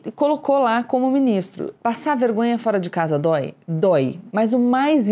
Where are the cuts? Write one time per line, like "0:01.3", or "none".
0:01.8